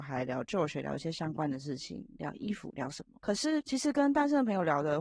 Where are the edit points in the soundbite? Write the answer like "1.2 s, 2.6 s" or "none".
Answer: none